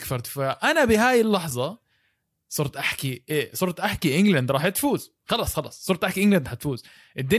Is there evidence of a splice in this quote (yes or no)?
yes